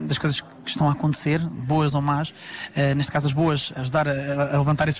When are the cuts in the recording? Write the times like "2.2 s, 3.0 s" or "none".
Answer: none